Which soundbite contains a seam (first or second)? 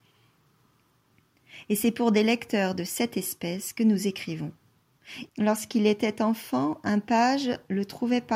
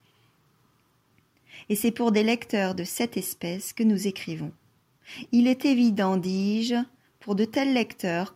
first